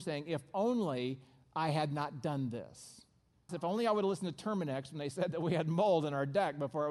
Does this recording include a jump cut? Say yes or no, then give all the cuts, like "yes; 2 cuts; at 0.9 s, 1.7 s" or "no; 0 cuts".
yes; 1 cut; at 3.5 s